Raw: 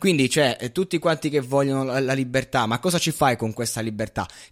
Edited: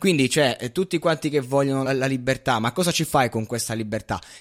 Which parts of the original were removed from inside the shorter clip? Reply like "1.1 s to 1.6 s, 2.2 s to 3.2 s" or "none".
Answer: 1.9 s to 1.9 s